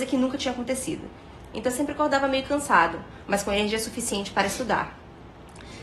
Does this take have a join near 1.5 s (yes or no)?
yes